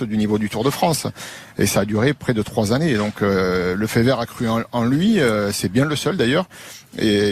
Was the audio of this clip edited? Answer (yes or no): no